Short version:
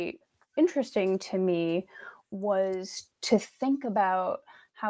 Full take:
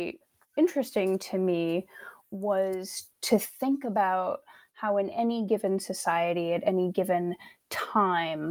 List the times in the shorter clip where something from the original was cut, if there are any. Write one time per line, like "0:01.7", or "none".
none